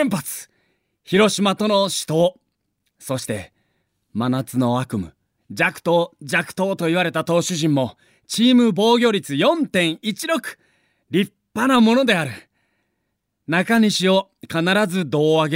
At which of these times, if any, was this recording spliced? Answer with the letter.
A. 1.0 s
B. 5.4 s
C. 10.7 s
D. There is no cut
B